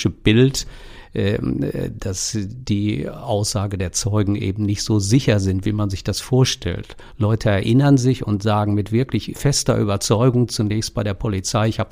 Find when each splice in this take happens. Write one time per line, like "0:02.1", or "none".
0:09.3

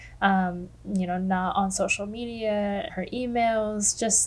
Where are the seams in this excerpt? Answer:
0:02.9

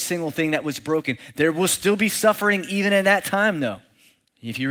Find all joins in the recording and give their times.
none

